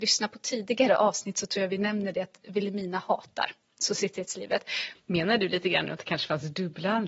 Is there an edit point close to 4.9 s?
yes; 1 cut; at 4.9 s

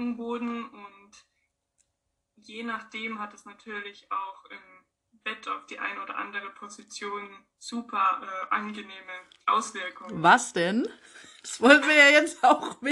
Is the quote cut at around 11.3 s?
no; 0 cuts

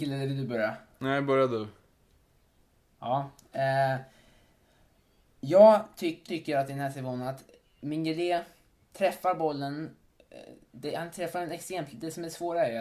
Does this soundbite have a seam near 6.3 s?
yes; 1 cut; at 6.3 s

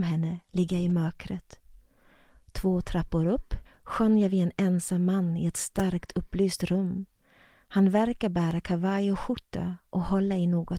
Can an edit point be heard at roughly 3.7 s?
yes; 1 cut; at 3.7 s

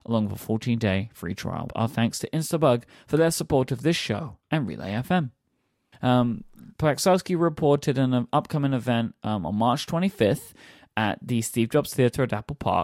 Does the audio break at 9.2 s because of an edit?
no; 2 cuts; at 1.7 s, 5.9 s

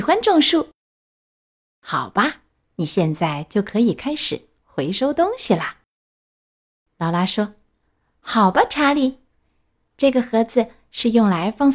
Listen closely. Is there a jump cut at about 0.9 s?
no; 0 cuts

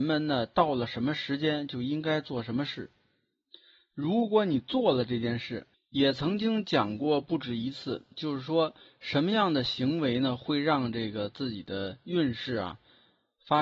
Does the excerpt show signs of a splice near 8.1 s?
no; 1 cut; at 5.7 s

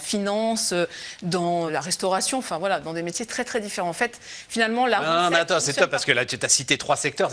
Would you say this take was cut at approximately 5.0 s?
no; 1 cut; at 1.7 s

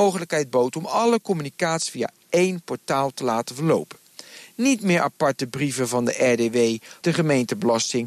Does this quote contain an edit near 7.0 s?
yes; 1 cut; at 7.0 s

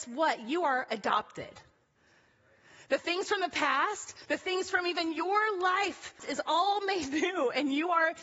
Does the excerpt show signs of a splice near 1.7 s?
no; 2 cuts; at 4.3 s, 6.2 s

